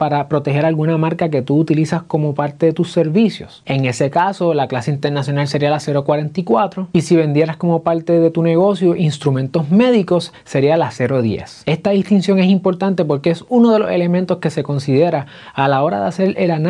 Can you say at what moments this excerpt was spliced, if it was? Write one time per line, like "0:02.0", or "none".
0:11.6

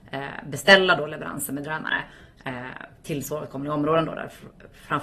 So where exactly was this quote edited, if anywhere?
none

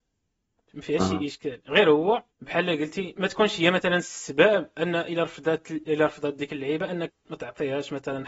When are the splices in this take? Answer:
0:02.3
0:07.1

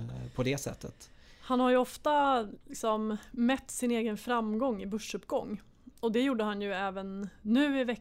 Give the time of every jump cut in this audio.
none

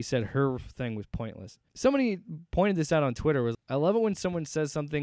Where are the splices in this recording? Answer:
0:01.7
0:03.5

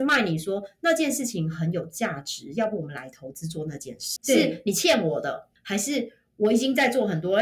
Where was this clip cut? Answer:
0:04.2
0:05.6

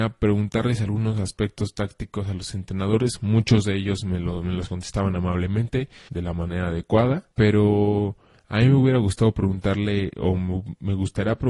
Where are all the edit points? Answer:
0:06.1
0:07.3

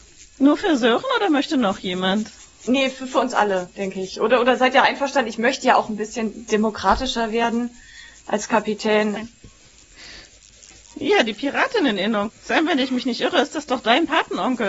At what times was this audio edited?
0:09.2
0:12.3

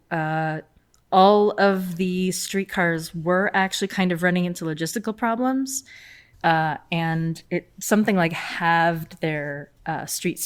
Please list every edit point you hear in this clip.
0:06.3

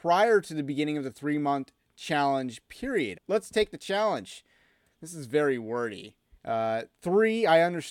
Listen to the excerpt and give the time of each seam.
0:03.1
0:04.9
0:06.4

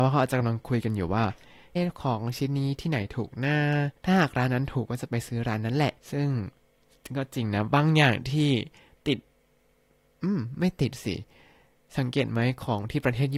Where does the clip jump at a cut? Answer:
0:01.8
0:04.0
0:06.0

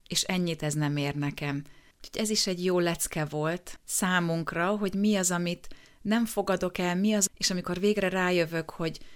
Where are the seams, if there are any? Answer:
0:01.9
0:07.3

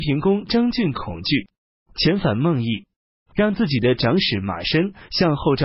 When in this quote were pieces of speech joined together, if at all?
none

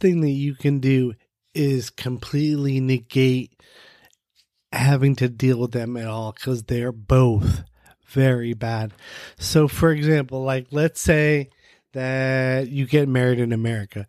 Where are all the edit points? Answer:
none

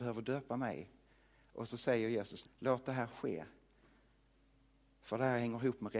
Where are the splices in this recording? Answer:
0:02.4

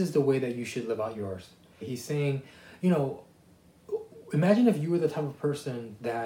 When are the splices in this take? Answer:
0:01.8

